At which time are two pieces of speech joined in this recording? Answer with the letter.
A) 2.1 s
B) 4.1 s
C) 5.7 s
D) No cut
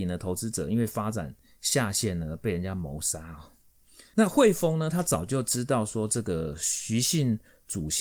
B